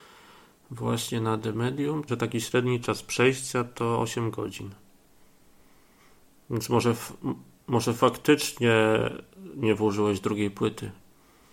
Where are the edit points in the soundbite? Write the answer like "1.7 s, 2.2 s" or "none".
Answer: 2.1 s